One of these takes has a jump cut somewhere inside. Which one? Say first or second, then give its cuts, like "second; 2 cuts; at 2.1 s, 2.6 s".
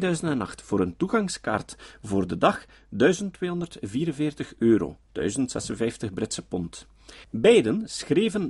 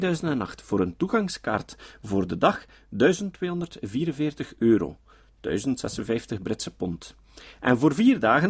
first; 2 cuts; at 5.0 s, 7.2 s